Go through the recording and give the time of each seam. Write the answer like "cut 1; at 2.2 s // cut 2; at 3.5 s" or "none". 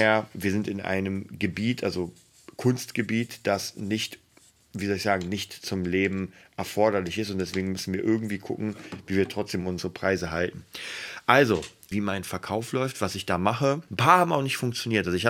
cut 1; at 11.9 s // cut 2; at 13.9 s